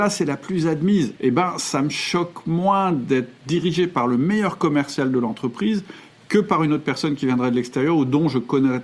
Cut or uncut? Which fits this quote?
cut